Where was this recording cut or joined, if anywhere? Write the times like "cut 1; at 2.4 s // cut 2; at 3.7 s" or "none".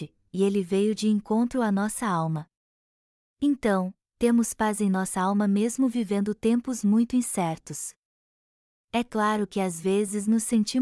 none